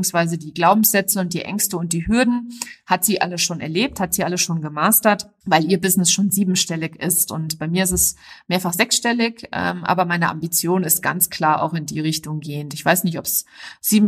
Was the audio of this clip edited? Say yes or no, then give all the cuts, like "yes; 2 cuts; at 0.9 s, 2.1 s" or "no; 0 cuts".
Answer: no; 0 cuts